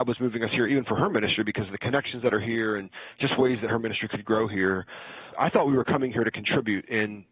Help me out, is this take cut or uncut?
cut